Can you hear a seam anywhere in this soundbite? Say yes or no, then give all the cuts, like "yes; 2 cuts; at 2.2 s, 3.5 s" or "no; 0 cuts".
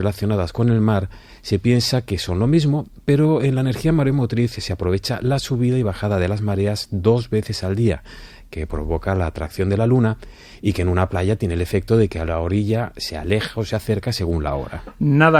no; 0 cuts